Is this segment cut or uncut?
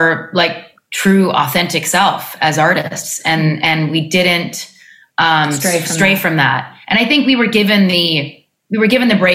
uncut